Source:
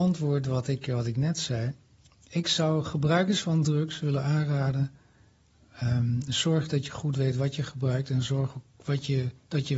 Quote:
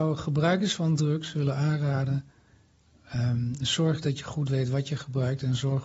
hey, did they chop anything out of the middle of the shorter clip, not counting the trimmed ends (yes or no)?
no